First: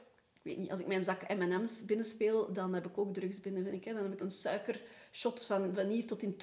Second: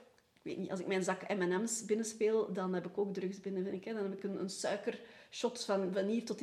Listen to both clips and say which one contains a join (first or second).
first